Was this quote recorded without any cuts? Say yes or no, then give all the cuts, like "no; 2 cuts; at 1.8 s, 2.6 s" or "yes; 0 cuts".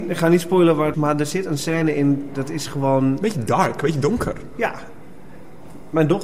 no; 1 cut; at 0.9 s